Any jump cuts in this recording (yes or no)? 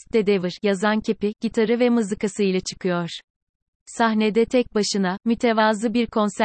no